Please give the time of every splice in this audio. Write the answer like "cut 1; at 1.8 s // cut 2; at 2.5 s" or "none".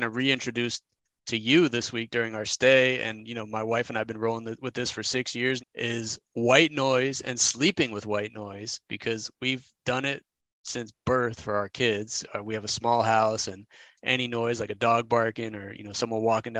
cut 1; at 5.6 s